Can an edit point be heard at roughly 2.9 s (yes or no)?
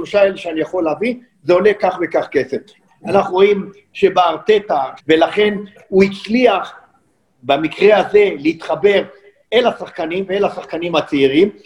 yes